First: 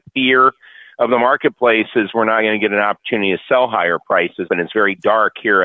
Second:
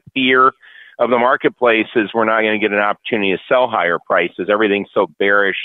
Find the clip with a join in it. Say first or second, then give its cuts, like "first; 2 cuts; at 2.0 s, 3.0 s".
first; 1 cut; at 4.5 s